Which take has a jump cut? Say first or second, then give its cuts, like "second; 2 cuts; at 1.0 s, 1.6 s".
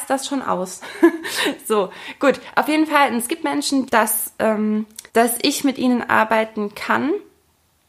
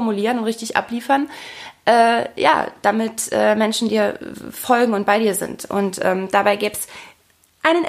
first; 2 cuts; at 3.9 s, 5.1 s